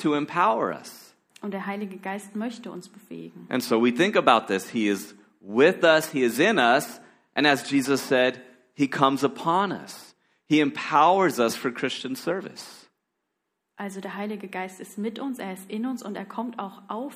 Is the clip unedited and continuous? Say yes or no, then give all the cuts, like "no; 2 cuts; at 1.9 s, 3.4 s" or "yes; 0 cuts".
yes; 0 cuts